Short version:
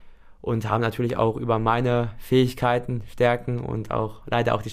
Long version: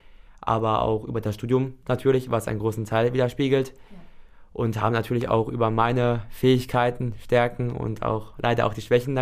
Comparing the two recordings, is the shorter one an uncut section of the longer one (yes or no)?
yes